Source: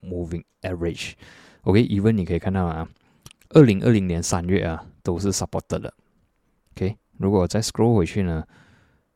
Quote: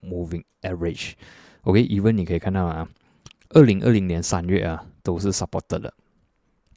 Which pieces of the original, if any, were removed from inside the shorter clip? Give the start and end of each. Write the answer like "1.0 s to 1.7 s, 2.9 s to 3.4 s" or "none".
none